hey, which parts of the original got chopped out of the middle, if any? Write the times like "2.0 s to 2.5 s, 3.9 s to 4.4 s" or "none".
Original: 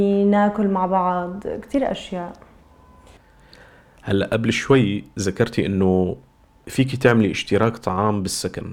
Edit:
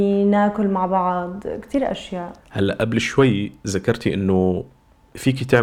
2.4 s to 3.9 s